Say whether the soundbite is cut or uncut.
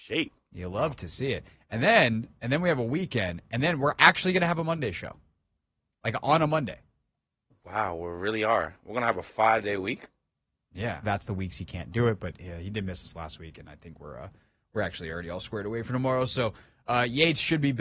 cut